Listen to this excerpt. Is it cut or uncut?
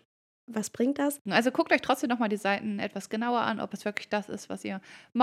cut